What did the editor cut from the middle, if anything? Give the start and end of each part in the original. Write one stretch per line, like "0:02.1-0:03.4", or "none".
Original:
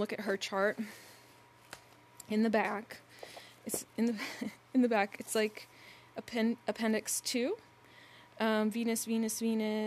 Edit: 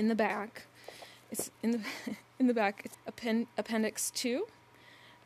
0:05.3-0:06.0